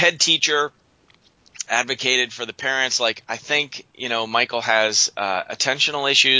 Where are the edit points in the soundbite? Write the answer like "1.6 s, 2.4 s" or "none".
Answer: 3.9 s